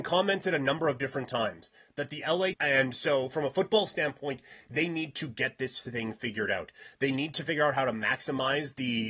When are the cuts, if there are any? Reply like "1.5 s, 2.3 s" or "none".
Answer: 2.5 s